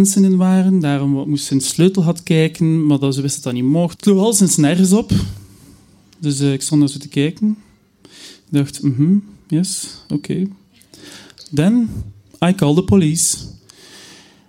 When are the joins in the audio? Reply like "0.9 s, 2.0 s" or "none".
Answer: 4.0 s

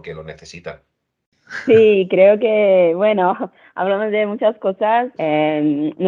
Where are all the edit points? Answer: 5.2 s

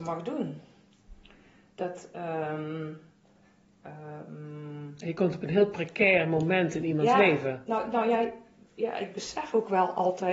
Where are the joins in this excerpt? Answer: none

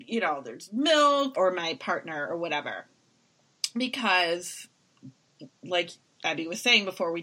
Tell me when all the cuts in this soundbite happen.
1.3 s

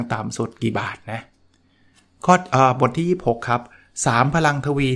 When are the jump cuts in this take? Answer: none

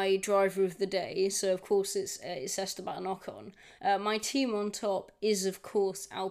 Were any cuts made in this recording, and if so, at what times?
3.8 s

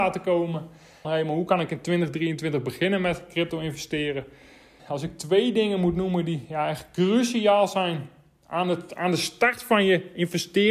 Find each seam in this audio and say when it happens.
1.0 s, 4.8 s

